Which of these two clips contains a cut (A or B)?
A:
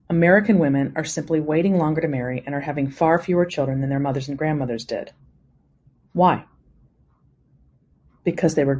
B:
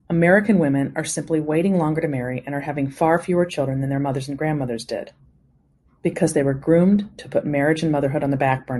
B